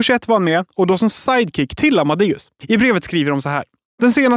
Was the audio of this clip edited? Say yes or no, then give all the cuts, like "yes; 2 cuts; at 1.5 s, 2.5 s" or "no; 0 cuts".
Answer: yes; 1 cut; at 2.6 s